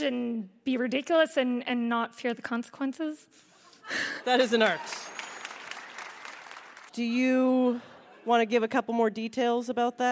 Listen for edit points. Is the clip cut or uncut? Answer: cut